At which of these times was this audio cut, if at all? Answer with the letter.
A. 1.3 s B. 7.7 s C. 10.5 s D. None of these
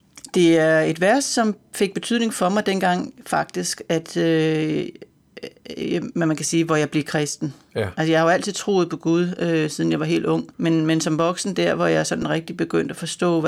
C